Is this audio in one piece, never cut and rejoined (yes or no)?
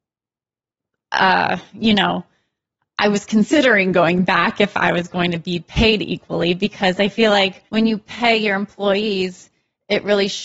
no